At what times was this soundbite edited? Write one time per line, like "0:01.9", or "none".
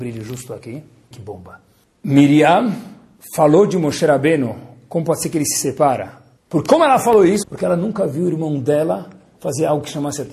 0:01.1
0:06.4
0:07.4